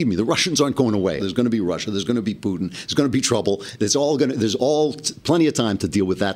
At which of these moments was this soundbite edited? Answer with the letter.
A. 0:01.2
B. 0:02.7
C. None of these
A